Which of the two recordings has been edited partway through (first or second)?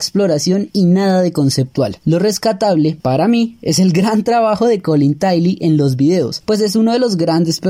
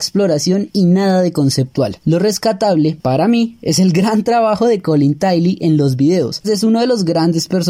second